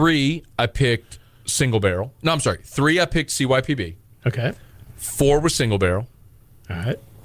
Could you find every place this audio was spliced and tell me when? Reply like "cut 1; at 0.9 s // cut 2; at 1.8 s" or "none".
none